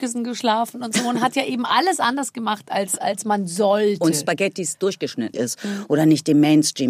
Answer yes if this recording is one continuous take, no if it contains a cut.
no